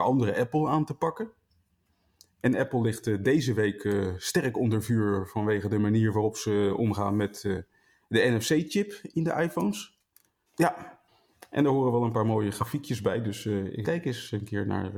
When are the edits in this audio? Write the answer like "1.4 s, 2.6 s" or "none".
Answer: 10.5 s, 13.8 s